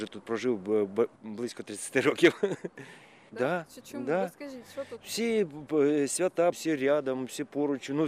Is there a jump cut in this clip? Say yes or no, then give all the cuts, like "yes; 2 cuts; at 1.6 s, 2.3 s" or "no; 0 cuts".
yes; 1 cut; at 3.3 s